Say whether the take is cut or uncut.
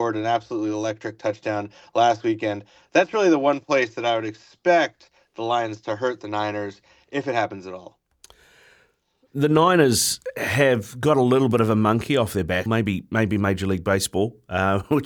cut